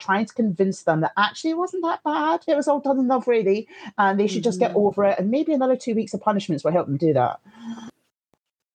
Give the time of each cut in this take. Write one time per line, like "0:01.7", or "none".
none

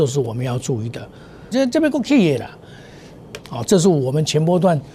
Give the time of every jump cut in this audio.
0:01.5
0:03.4

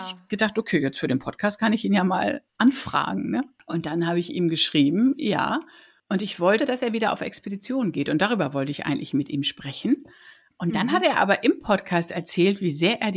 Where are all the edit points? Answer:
0:06.6

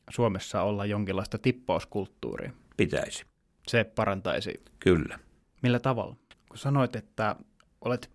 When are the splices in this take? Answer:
0:06.3

